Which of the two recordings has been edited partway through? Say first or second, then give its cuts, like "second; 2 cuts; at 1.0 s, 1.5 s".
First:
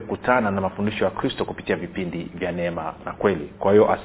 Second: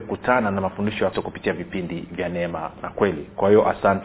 second; 1 cut; at 1.1 s